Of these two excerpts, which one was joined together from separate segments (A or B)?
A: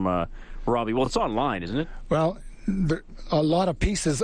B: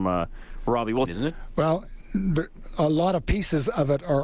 B